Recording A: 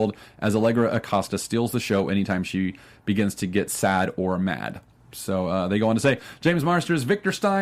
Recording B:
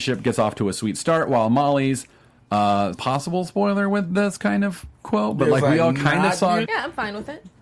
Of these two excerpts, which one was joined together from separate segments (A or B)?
B